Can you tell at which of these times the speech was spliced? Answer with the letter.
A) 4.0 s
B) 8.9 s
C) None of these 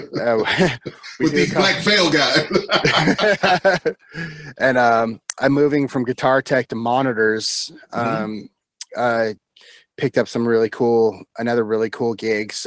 B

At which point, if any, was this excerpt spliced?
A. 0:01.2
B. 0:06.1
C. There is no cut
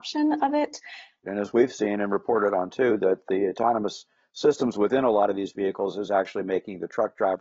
A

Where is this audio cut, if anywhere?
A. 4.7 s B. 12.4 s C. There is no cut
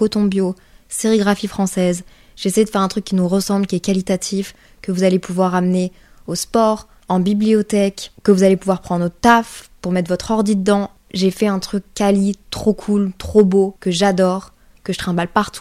C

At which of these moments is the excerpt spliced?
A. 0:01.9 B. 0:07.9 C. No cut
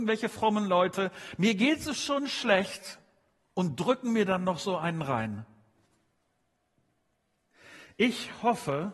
C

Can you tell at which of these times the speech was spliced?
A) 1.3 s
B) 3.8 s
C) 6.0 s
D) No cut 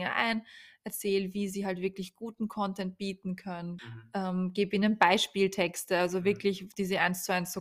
B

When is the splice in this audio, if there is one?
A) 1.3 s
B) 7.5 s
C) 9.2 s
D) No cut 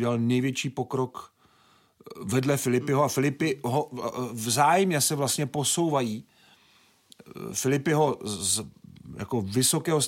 D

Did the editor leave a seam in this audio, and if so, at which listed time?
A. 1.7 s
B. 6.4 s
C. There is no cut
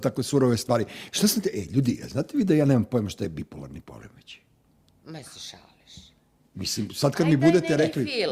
C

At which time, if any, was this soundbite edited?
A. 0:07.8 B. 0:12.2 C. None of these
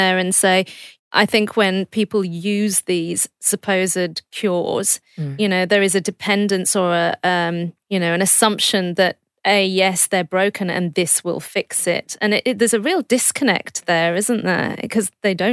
A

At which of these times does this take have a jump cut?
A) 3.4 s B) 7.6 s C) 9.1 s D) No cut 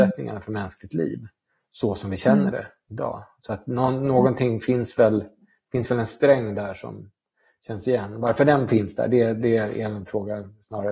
D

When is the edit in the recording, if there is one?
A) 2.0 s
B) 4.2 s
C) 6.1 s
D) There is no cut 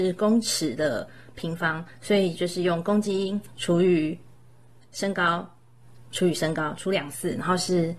D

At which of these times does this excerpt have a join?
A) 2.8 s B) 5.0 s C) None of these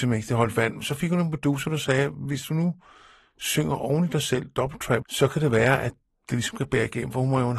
B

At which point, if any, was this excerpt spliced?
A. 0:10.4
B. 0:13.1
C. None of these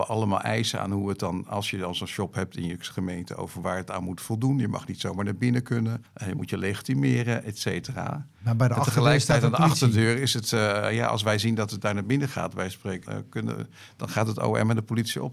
B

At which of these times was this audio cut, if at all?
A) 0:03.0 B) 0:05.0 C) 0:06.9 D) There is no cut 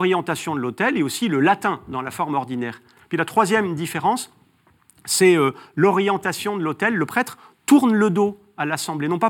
A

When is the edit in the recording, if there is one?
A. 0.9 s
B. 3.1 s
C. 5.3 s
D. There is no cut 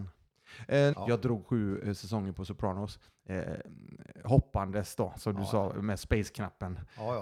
A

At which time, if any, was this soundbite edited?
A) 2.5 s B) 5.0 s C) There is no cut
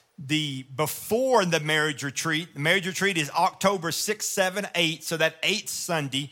C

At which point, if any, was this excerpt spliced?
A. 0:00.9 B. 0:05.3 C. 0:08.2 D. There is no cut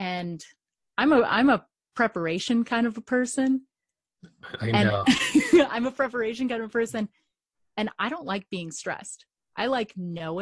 D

